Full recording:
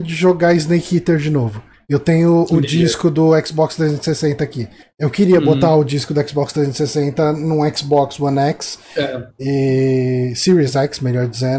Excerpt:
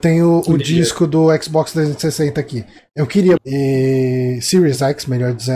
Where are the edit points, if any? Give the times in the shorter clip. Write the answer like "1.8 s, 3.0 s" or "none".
3.4 s